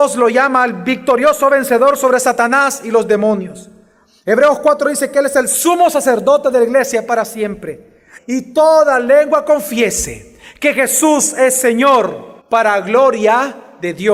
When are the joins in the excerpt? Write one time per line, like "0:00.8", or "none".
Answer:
0:08.2
0:12.4

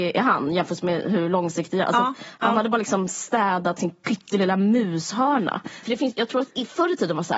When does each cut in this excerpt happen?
0:05.8

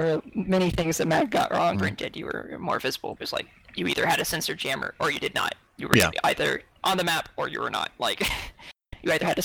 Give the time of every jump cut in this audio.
0:01.7
0:03.2

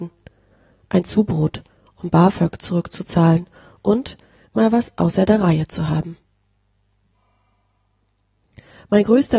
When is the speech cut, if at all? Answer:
none

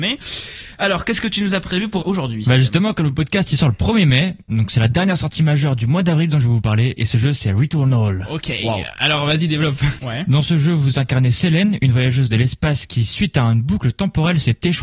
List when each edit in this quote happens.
0:02.0
0:10.0

